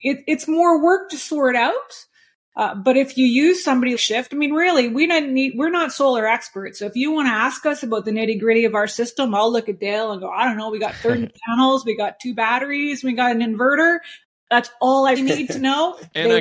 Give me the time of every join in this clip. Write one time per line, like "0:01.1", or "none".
0:04.0
0:15.2

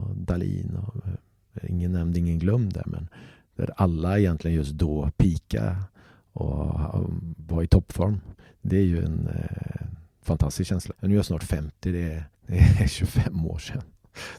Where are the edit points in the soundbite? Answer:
0:10.9
0:12.3

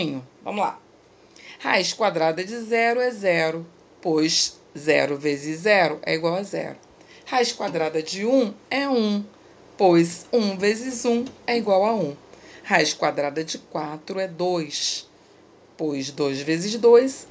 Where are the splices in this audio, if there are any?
none

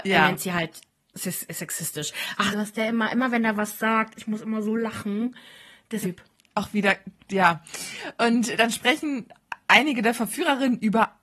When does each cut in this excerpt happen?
0:02.5
0:06.0

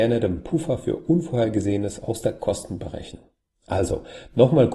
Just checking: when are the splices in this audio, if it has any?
0:03.5

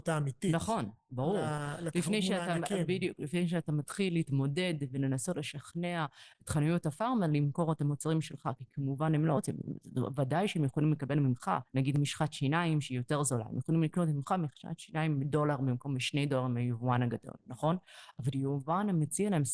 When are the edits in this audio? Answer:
none

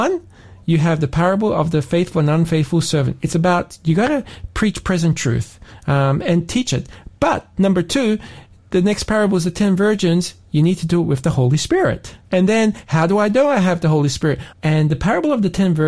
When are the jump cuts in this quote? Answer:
0:12.2
0:14.5

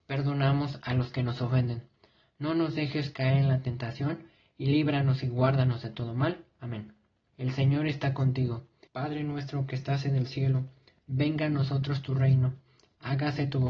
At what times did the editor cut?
0:07.3
0:08.9
0:11.0

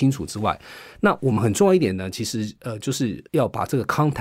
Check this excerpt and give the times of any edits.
0:03.3

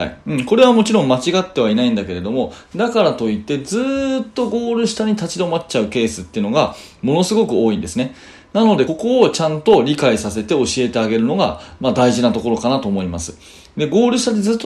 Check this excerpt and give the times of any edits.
0:08.9

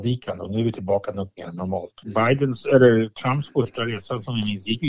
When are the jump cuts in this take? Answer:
0:02.0

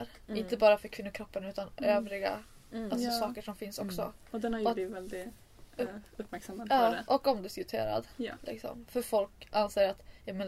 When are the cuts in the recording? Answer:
none

